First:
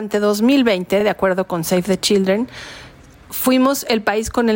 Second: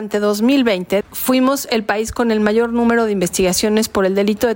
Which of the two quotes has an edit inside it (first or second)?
second